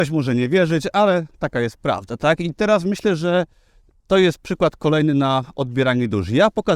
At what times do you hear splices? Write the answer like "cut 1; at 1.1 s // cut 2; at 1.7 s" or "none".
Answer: none